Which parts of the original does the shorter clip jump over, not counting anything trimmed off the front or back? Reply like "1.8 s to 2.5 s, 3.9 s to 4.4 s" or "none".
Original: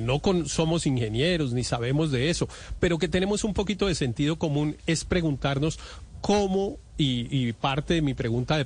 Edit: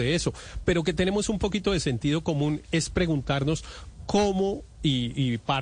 none